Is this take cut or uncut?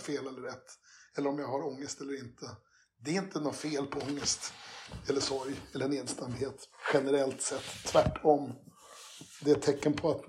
uncut